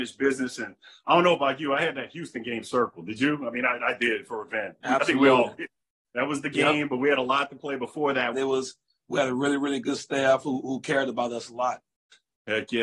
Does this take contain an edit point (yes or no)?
yes